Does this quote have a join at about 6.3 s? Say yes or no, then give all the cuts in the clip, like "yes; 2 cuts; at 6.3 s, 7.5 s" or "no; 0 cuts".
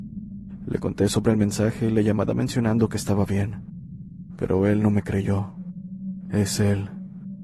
yes; 1 cut; at 6.3 s